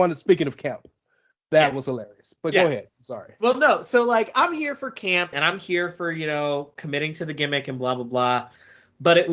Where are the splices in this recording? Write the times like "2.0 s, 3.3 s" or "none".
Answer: 5.3 s